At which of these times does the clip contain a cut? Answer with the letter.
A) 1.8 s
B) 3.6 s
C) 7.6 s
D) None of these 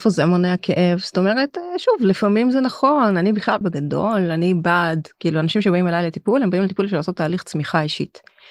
B